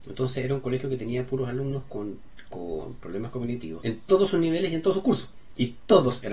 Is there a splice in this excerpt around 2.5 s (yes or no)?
no